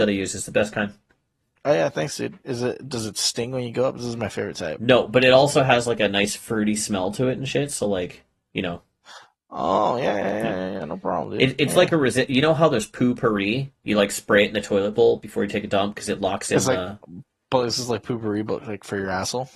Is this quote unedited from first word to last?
yes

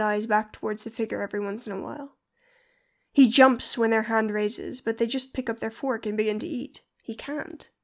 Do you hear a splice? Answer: yes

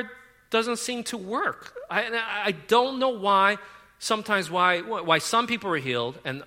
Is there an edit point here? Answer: no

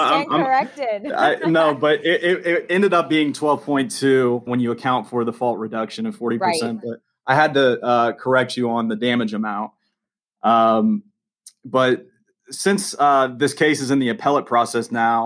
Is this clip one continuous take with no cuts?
no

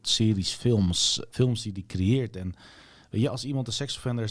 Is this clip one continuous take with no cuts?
no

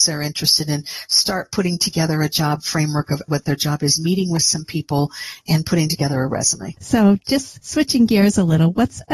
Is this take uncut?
no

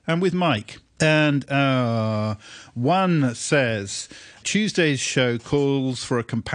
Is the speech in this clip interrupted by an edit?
yes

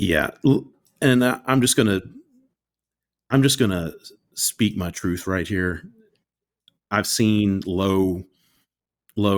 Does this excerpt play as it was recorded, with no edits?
yes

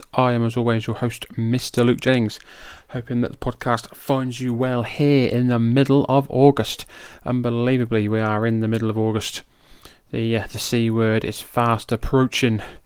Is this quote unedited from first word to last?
yes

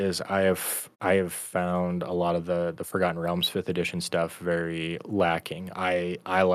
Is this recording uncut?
no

